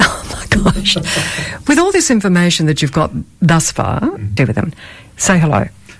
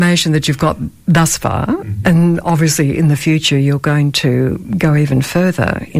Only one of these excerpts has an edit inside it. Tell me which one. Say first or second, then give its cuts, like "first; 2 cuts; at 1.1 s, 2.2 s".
first; 1 cut; at 4.4 s